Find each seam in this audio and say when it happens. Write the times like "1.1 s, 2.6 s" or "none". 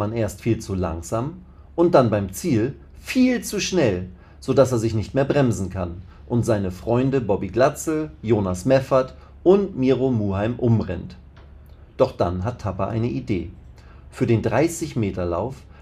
none